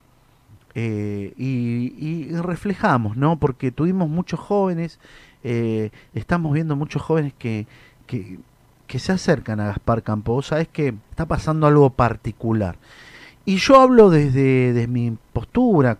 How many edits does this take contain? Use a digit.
1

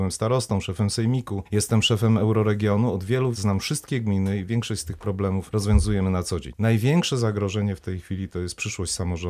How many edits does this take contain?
1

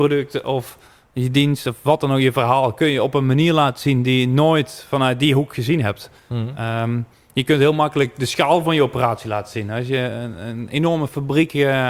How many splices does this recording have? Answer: 0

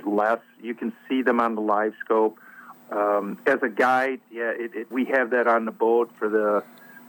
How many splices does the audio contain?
2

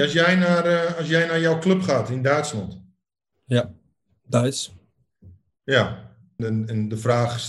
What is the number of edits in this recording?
2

